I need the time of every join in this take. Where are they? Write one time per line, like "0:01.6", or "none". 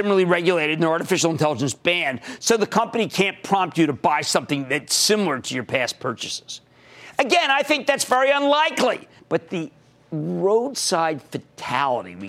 0:09.2